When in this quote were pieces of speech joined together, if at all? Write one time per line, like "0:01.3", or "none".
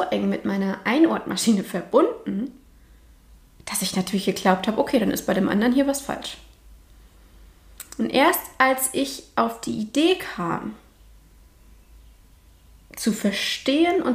none